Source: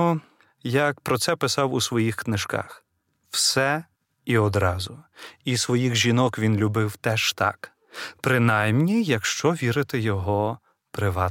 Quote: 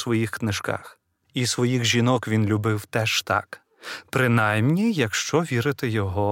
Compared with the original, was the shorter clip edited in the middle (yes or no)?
yes